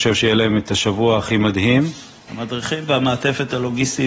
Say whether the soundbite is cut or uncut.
cut